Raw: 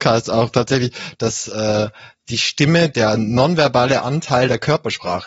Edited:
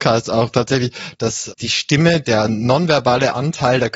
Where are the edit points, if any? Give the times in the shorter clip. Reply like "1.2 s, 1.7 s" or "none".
1.5 s